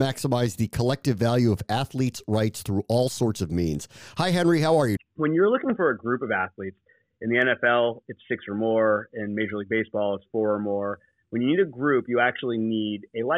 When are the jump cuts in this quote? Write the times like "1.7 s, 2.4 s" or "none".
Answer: 5.0 s